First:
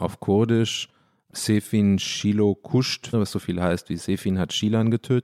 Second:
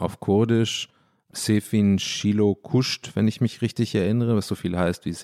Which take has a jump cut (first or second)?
first